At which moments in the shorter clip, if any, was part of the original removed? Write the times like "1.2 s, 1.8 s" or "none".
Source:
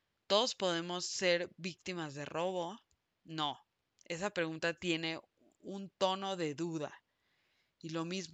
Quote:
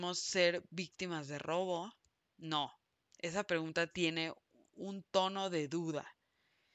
none